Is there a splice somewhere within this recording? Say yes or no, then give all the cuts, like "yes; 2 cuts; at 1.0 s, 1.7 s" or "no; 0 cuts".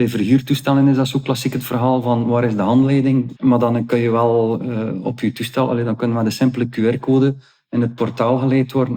yes; 1 cut; at 3.4 s